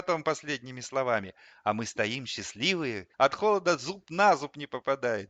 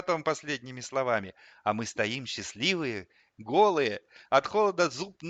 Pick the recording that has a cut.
first; 1 cut; at 3.1 s

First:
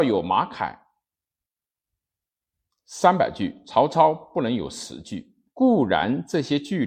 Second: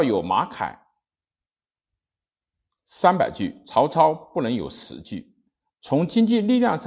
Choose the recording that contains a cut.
first; 1 cut; at 5.5 s

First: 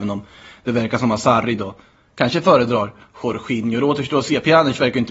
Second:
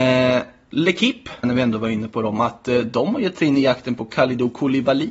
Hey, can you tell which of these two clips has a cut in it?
second; 1 cut; at 1.4 s

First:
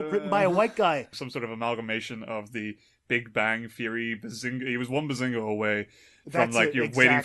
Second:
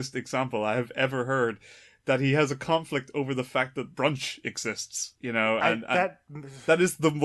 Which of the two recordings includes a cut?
first; 1 cut; at 1.1 s

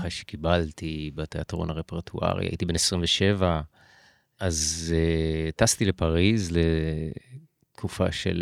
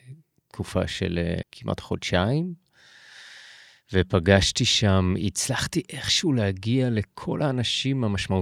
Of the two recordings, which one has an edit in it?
second; 1 cut; at 1.4 s

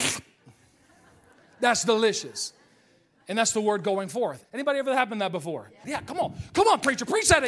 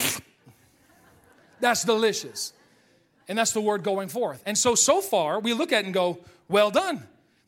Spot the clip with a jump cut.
first; 2 cuts; at 4.4 s, 5.8 s

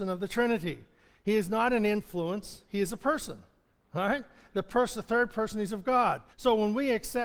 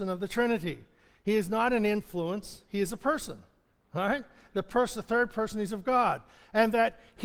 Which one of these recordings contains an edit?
first; 1 cut; at 6.3 s

